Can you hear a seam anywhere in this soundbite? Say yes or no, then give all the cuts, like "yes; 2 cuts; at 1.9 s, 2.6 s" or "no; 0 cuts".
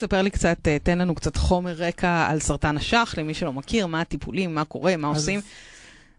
no; 0 cuts